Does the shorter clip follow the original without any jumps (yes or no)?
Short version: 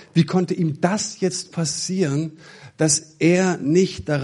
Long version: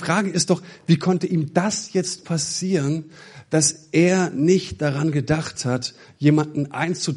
yes